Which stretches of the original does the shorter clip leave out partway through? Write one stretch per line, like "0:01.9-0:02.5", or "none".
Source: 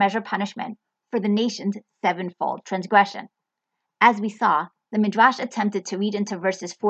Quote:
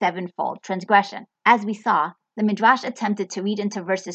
0:03.4-0:03.9